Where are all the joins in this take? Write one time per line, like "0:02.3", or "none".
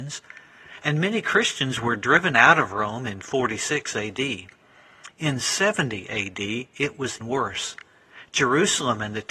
0:07.2